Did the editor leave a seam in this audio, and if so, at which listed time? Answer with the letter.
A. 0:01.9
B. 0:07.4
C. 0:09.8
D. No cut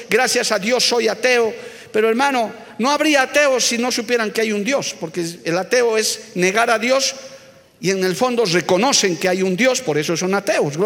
D